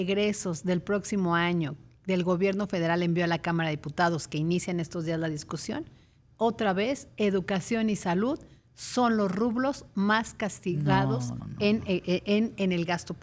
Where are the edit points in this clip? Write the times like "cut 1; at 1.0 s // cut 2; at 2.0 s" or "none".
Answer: cut 1; at 11.4 s